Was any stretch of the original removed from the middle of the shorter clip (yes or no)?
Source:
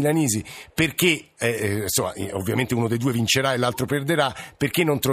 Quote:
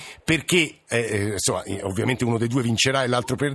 no